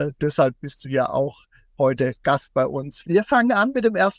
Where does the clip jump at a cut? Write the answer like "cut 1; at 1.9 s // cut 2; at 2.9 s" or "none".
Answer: cut 1; at 3.0 s